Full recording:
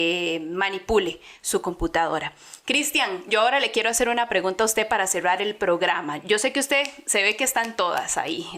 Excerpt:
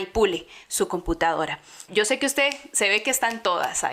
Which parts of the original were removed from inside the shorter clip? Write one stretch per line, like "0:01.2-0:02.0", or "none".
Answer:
0:02.6-0:06.2